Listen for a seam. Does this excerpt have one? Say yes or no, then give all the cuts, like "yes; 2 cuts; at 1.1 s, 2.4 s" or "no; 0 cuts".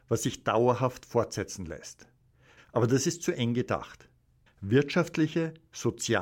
yes; 2 cuts; at 2.6 s, 4.5 s